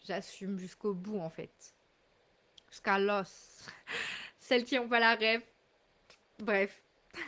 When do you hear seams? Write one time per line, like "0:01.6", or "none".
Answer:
none